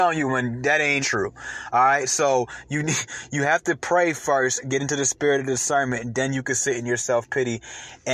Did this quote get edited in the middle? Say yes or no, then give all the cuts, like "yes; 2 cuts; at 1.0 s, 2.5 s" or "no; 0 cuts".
yes; 1 cut; at 1.0 s